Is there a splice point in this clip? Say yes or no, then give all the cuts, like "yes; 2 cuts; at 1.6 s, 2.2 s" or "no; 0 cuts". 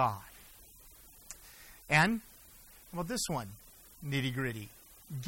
no; 0 cuts